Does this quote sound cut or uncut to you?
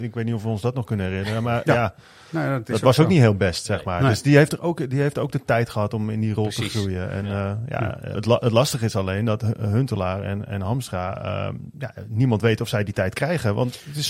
cut